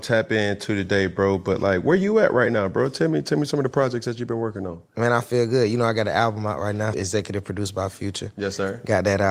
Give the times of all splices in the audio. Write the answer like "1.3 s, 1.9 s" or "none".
6.9 s